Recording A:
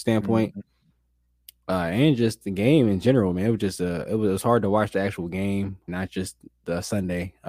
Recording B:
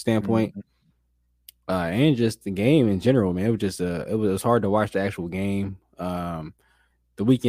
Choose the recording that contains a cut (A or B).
A